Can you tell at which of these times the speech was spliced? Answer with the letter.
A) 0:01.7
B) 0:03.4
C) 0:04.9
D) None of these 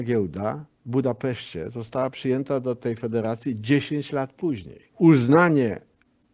C